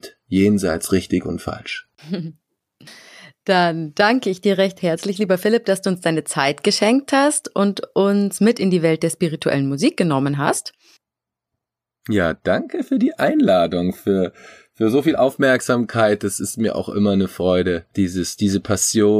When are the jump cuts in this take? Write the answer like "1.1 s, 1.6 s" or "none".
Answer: none